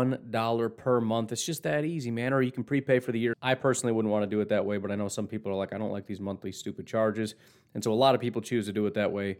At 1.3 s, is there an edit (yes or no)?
no